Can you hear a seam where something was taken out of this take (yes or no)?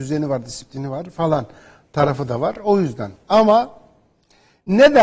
no